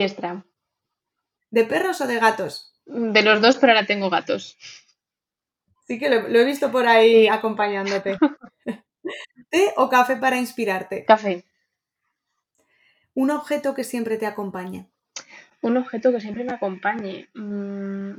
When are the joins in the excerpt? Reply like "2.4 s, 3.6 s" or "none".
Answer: none